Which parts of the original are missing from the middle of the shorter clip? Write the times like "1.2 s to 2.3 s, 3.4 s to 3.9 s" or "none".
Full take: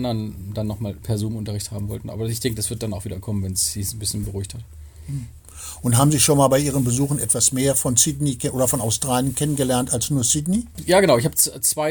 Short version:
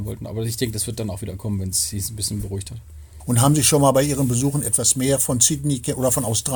5.0 s to 5.8 s